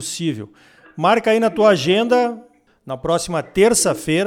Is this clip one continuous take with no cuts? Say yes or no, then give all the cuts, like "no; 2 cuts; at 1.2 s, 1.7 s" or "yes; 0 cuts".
no; 1 cut; at 2.7 s